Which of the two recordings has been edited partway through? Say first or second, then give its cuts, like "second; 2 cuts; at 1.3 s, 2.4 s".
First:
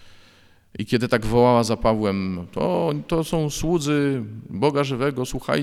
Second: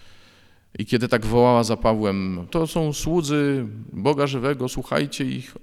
second; 1 cut; at 2.5 s